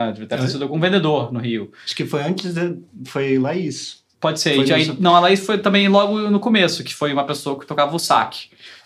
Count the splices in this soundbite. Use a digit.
1